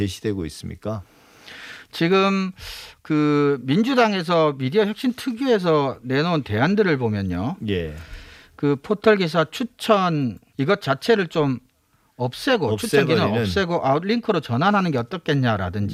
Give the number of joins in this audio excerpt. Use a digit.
0